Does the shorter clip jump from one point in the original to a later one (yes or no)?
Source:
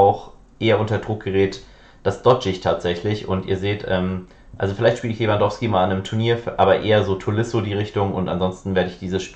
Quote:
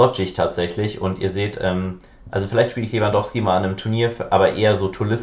no